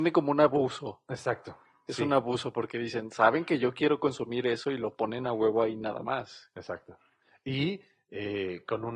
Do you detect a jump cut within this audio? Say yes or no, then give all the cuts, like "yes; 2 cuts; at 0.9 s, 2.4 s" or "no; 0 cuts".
no; 0 cuts